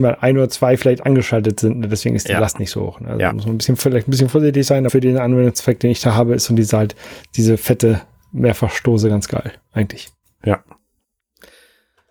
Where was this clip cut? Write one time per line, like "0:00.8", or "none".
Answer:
0:04.9